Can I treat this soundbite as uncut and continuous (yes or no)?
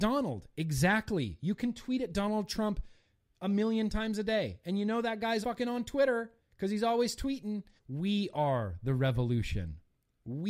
no